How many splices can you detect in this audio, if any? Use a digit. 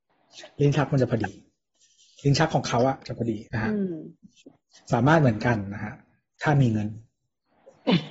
1